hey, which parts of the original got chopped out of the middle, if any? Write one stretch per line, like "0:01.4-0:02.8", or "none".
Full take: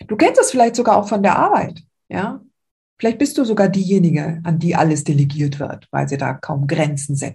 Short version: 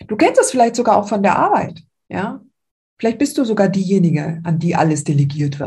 none